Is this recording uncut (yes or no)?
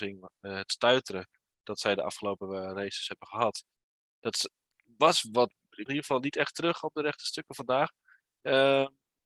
no